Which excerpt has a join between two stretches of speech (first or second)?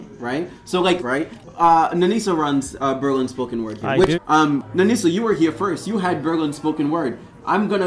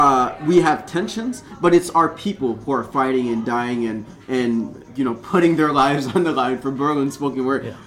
first